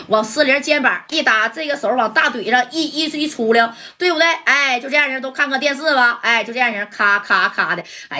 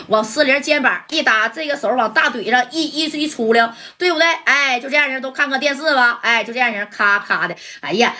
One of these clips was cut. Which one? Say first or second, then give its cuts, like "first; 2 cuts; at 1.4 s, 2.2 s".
second; 1 cut; at 7.2 s